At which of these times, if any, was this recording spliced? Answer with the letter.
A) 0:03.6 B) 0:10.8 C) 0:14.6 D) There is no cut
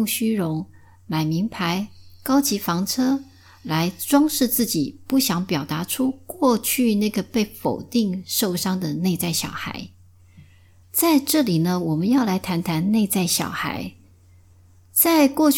B